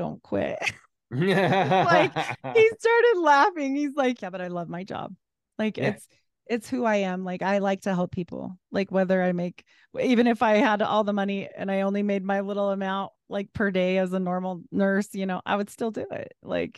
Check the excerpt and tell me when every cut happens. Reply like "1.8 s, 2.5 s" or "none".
4.2 s